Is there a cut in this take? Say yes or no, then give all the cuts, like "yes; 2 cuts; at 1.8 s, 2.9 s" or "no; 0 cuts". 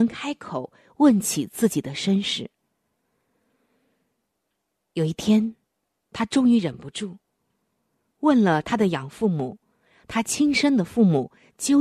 no; 0 cuts